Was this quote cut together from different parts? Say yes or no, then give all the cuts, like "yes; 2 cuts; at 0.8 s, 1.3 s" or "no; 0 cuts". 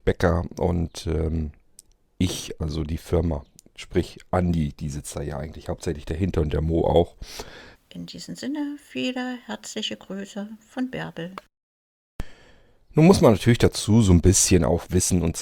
yes; 1 cut; at 7.8 s